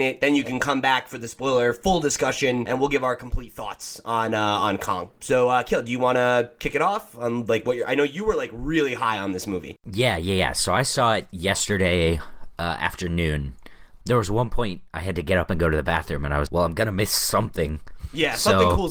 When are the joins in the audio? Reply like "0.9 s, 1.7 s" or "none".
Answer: 14.0 s, 16.5 s